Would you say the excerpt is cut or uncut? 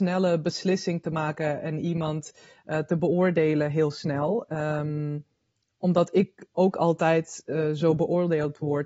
uncut